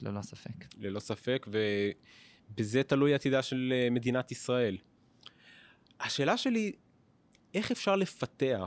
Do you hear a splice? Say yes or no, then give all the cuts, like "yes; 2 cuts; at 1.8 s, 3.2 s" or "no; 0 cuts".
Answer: yes; 1 cut; at 5.8 s